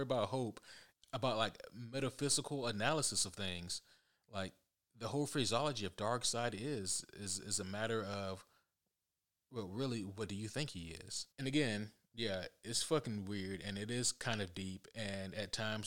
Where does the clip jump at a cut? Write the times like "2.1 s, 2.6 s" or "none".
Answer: 0.9 s, 11.3 s